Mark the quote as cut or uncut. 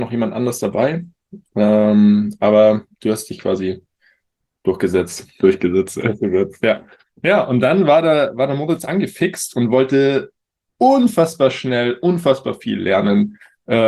uncut